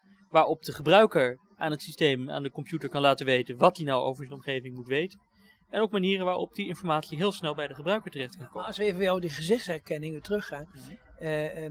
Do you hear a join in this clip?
no; 0 cuts

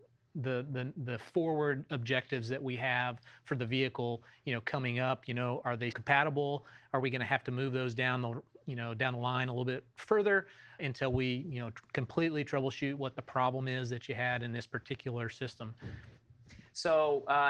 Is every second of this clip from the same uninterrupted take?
no; 2 cuts; at 5.9 s, 10.8 s

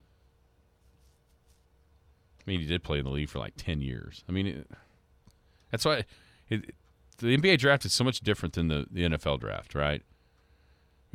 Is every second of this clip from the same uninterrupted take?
yes; 0 cuts

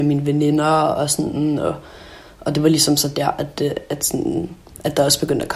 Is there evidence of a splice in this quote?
no; 0 cuts

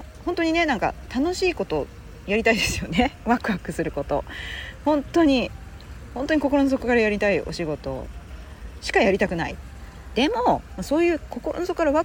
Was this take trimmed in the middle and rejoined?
yes; 1 cut; at 10.2 s

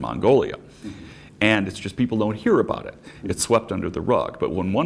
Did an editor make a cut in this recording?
no; 0 cuts

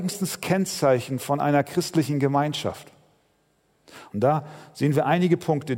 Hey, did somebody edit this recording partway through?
yes; 1 cut; at 4.1 s

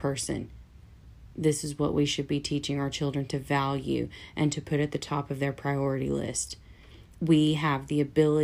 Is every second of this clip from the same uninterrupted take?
yes; 0 cuts

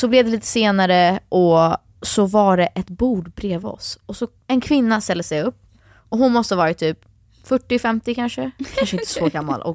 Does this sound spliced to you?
no; 0 cuts

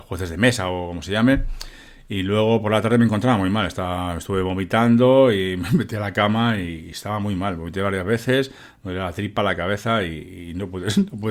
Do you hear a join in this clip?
no; 0 cuts

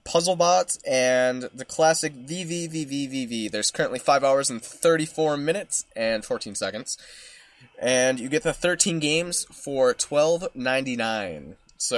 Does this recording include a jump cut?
no; 0 cuts

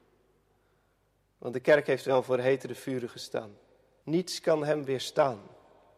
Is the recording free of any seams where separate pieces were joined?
no; 1 cut; at 4.0 s

